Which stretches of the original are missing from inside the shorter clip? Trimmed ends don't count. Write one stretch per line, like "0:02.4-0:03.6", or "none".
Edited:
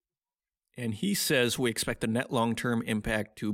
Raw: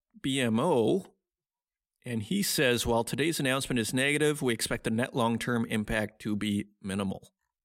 0:02.8-0:04.4